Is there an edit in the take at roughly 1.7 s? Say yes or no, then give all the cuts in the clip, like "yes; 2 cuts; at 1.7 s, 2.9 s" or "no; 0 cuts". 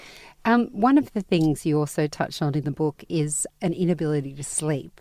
no; 1 cut; at 3.5 s